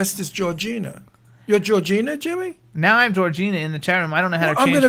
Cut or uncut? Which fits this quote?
uncut